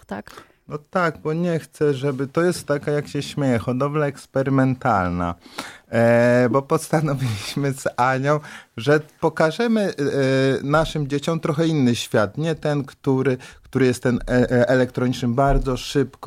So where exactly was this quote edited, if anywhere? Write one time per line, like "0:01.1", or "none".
none